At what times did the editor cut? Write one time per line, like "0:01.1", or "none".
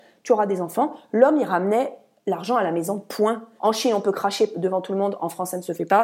0:03.6